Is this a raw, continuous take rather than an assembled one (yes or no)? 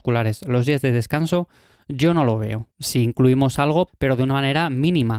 no